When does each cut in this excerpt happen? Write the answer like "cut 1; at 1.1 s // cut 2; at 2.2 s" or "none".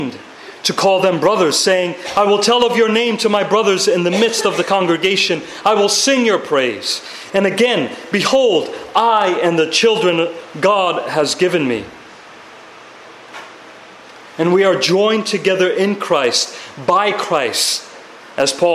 cut 1; at 7.3 s